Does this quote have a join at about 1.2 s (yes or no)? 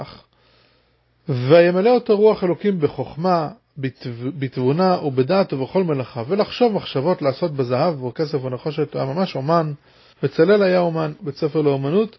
no